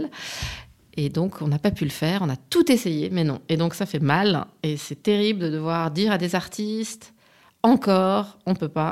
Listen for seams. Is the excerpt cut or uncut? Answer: uncut